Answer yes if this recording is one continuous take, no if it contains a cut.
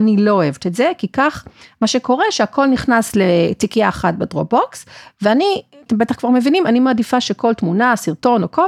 no